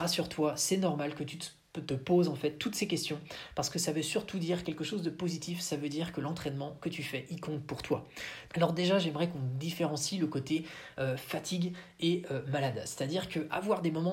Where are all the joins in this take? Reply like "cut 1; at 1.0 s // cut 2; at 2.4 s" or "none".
cut 1; at 8.5 s